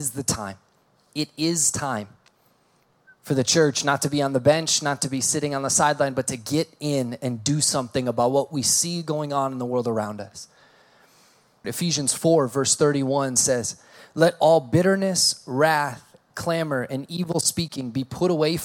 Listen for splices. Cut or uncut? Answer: cut